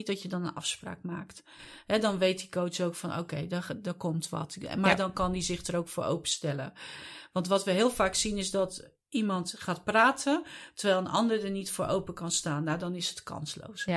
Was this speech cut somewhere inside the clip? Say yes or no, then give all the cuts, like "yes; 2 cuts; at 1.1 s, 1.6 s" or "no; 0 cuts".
no; 0 cuts